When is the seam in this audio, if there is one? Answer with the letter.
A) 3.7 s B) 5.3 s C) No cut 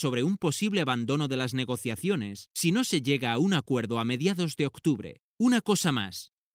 B